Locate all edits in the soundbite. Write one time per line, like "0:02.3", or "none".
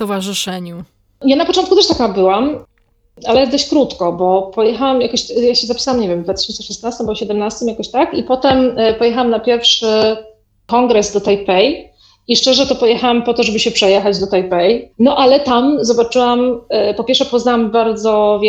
0:14.9